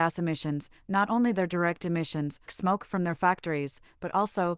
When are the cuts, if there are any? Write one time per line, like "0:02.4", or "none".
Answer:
0:02.5